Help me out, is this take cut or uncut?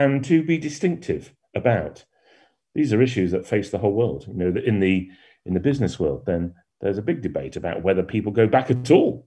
uncut